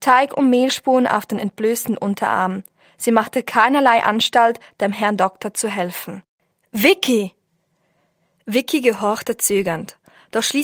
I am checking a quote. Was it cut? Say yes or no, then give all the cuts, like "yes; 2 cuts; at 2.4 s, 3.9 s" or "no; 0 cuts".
no; 0 cuts